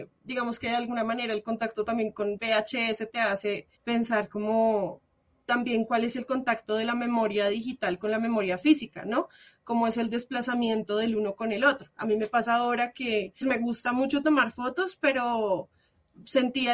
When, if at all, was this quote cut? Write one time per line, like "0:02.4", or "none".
0:03.8
0:13.4